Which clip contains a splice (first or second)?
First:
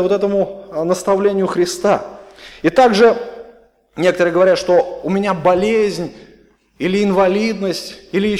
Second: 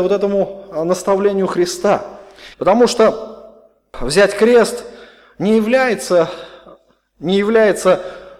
second